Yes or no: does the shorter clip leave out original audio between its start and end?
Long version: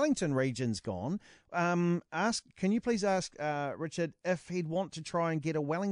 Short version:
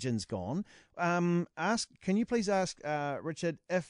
no